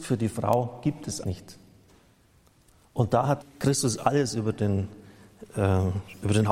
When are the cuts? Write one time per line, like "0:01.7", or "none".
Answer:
0:01.2
0:03.4